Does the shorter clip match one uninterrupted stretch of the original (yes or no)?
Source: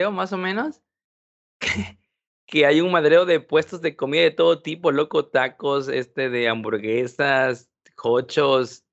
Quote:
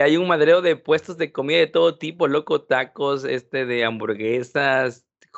yes